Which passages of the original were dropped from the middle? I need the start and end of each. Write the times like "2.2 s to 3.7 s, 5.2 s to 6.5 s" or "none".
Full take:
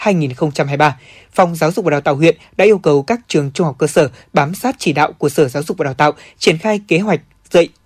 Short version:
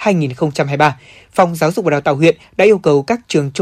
none